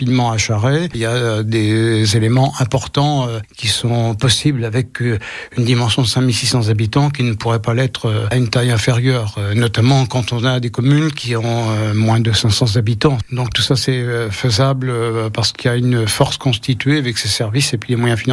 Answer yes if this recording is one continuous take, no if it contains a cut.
yes